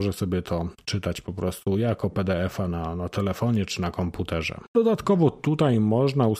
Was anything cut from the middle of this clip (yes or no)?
yes